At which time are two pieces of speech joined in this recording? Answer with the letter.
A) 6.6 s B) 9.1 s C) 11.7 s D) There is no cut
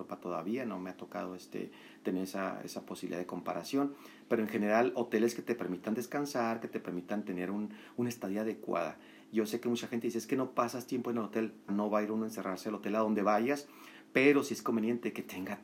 C